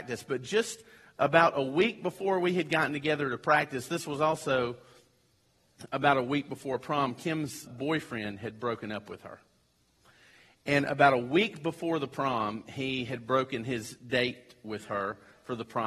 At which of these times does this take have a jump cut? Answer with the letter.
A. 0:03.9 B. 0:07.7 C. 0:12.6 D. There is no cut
B